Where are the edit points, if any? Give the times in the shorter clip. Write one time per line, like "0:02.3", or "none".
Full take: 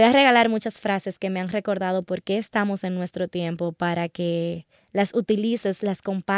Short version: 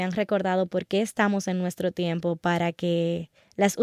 none